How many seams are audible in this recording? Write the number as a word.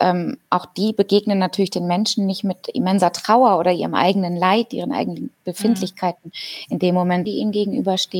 one